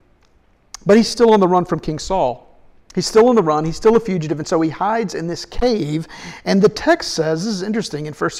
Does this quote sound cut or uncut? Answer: uncut